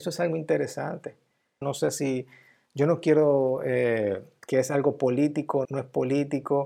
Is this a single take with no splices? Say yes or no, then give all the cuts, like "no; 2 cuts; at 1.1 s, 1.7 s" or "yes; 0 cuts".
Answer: no; 3 cuts; at 1.6 s, 4.4 s, 5.6 s